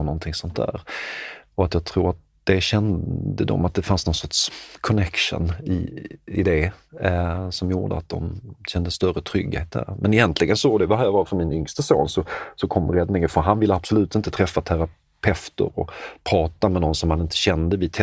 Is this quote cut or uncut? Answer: uncut